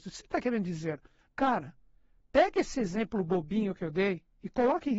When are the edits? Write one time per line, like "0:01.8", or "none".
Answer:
none